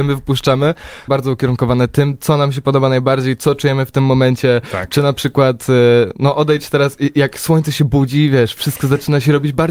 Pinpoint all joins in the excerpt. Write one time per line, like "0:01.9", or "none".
0:01.1